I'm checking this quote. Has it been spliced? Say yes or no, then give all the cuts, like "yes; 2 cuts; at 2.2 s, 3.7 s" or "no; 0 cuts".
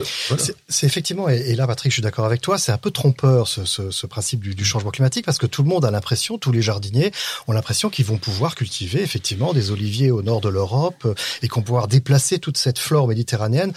no; 0 cuts